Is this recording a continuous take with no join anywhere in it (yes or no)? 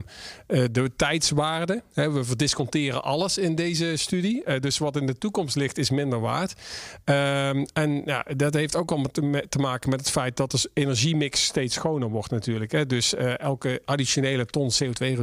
yes